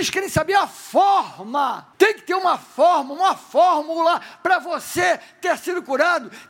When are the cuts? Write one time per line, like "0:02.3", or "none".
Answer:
0:01.9

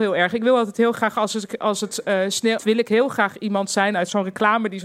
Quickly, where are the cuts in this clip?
0:02.6

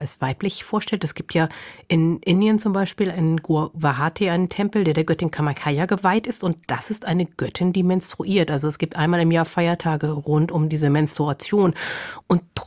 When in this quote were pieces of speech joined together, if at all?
none

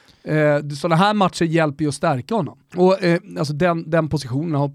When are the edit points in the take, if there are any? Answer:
0:02.7

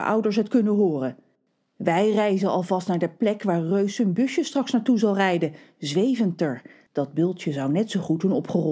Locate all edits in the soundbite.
0:06.9

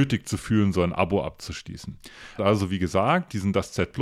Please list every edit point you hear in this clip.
0:02.4

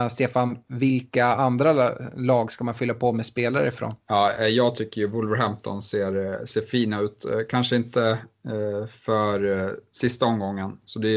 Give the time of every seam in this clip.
0:04.0

